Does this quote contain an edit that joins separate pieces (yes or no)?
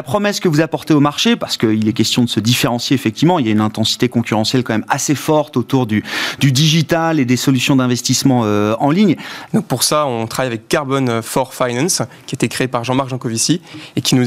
yes